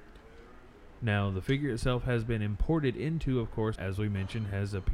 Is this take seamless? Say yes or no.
no